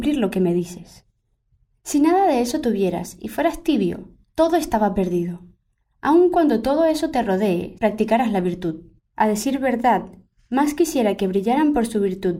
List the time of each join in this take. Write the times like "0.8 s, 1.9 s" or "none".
7.8 s, 9.0 s